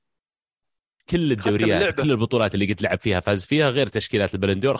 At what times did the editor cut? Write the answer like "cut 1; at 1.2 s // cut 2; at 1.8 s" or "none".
cut 1; at 1.0 s